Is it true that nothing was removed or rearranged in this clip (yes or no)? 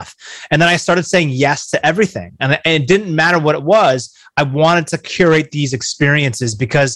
yes